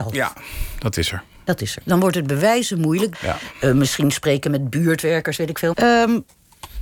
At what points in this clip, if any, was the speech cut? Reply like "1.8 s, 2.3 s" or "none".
1.8 s, 3.1 s, 5.7 s